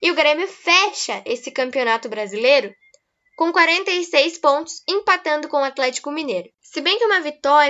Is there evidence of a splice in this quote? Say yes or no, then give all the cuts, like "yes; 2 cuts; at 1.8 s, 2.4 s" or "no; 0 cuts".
no; 0 cuts